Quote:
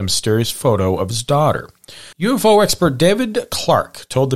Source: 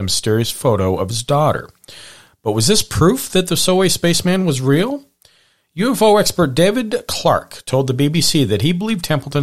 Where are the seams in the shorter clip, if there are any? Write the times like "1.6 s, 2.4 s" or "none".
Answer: 2.1 s